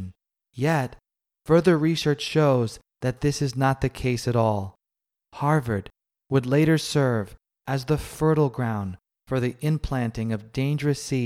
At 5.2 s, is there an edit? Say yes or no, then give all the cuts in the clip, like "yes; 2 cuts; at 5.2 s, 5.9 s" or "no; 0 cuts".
yes; 1 cut; at 5.2 s